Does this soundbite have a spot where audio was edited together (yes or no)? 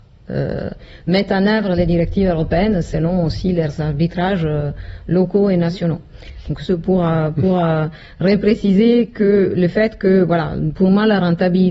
yes